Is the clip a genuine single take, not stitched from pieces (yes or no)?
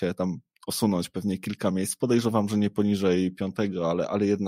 yes